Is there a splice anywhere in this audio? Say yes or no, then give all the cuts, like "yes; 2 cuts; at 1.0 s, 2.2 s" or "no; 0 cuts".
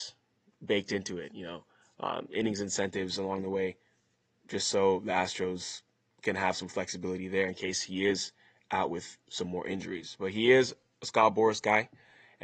no; 0 cuts